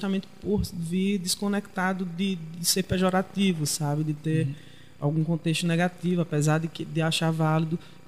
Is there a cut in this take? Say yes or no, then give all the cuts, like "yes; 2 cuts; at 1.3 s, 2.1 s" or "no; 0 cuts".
no; 0 cuts